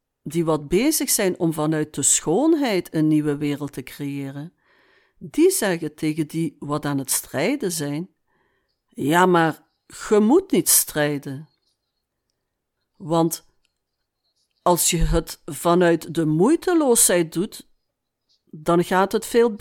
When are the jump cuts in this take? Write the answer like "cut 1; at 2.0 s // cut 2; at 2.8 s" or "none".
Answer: cut 1; at 12.8 s